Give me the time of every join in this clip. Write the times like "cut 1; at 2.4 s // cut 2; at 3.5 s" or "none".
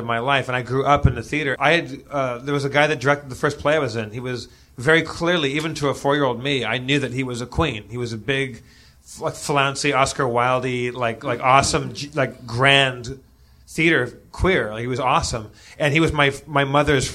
cut 1; at 1.6 s